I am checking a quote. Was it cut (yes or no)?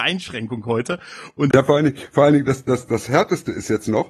yes